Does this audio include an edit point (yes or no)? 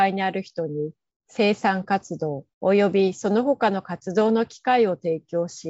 yes